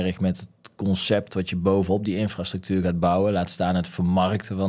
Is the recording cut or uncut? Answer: uncut